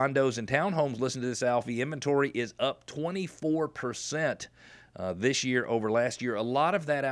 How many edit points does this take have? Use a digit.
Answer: 0